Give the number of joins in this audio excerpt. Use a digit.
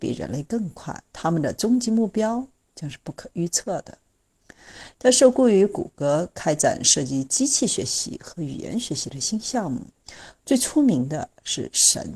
2